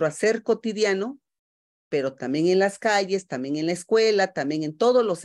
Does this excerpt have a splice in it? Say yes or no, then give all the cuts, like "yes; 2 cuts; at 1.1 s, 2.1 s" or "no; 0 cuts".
no; 0 cuts